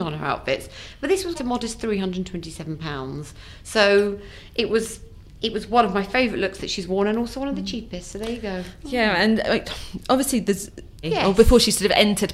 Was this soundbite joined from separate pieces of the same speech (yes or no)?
yes